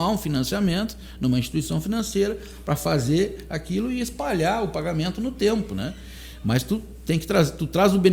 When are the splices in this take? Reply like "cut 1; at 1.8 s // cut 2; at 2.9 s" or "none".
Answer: none